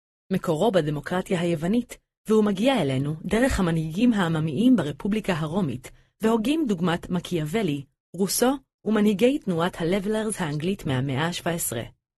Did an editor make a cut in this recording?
no; 0 cuts

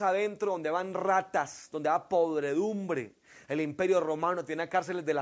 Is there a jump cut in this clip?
yes; 1 cut; at 3.4 s

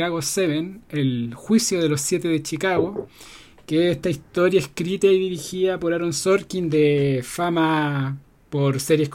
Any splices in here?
no; 0 cuts

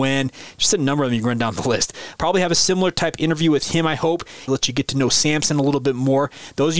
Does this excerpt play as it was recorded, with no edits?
no; 2 cuts; at 2.2 s, 4.5 s

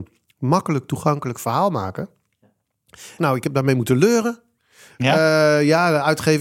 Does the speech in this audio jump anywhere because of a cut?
yes; 1 cut; at 3.2 s

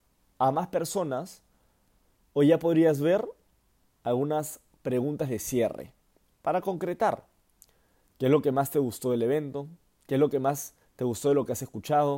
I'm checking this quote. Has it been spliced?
no; 0 cuts

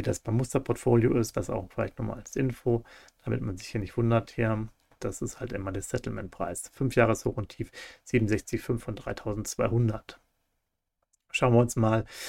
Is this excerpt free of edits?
no; 1 cut; at 1.3 s

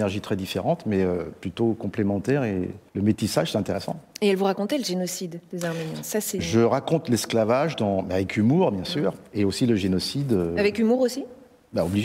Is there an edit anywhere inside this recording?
yes; 1 cut; at 2.9 s

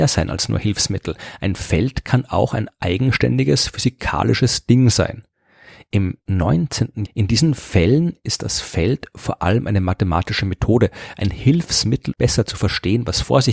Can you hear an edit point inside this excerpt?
yes; 2 cuts; at 7.1 s, 12.1 s

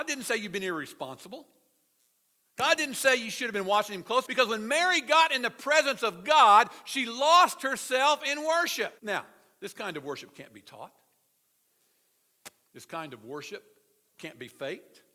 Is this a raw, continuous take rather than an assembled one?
no; 2 cuts; at 4.2 s, 9.0 s

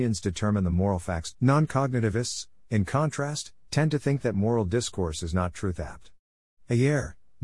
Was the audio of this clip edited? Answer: yes; 1 cut; at 1.3 s

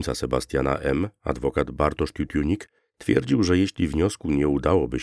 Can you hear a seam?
no; 0 cuts

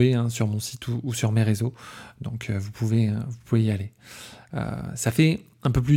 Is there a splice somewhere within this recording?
no; 0 cuts

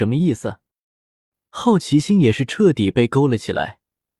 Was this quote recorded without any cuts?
no; 1 cut; at 1.5 s

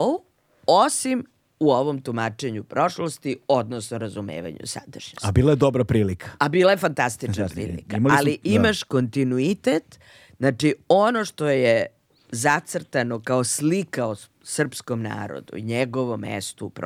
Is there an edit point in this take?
no; 0 cuts

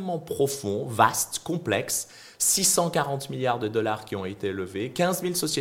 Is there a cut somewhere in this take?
no; 0 cuts

